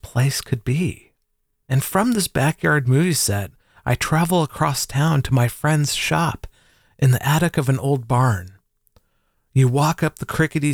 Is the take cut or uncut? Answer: uncut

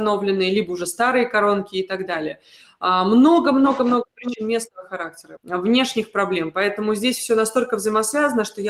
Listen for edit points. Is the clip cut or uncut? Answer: cut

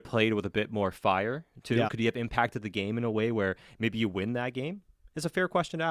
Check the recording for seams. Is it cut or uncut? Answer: cut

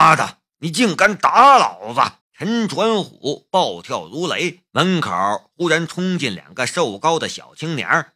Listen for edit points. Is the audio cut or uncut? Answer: cut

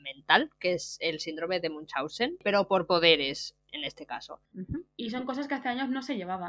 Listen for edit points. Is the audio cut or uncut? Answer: cut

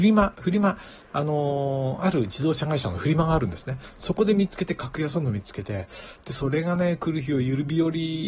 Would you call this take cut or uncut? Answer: uncut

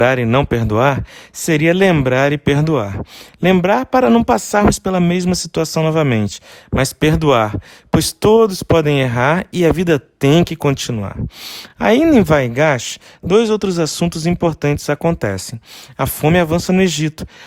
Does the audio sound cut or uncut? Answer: uncut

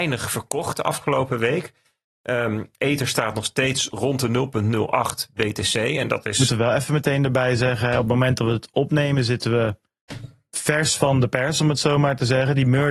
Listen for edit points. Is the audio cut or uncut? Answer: uncut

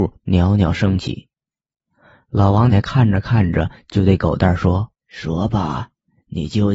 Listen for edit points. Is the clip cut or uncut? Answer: cut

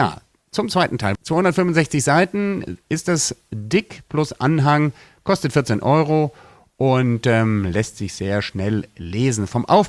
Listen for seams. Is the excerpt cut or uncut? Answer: cut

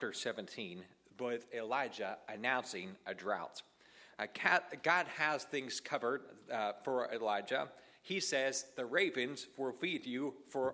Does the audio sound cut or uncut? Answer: uncut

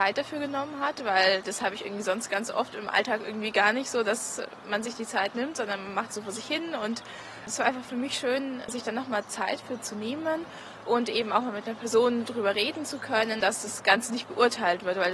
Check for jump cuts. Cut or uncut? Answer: cut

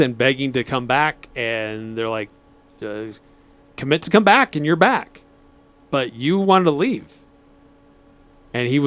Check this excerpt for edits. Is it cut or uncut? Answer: uncut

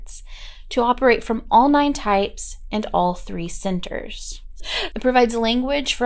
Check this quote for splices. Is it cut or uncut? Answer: cut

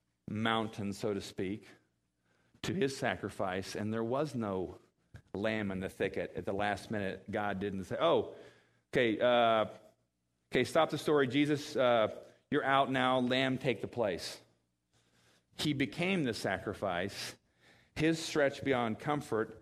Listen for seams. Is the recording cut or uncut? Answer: cut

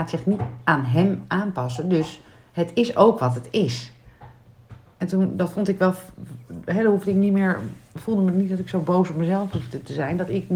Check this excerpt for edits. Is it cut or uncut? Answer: uncut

